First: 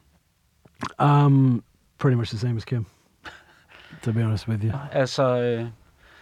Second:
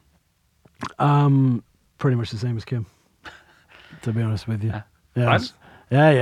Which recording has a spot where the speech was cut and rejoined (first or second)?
first